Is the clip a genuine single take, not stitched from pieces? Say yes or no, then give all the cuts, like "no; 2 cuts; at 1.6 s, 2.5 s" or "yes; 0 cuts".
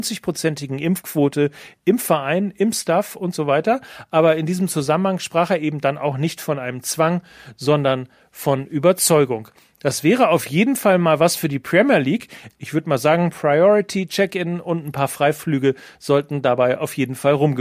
no; 1 cut; at 12.5 s